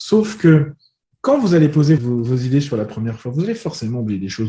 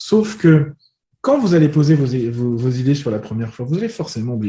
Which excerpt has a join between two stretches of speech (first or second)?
first